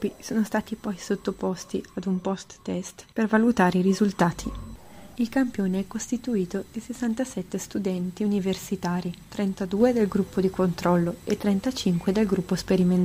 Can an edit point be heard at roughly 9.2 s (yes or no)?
yes